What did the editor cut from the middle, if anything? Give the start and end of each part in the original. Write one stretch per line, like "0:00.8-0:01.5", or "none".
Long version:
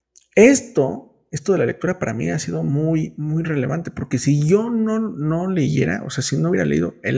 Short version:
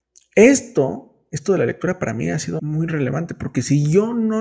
0:02.6-0:03.2